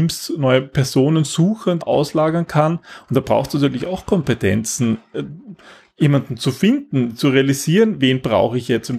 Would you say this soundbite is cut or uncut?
cut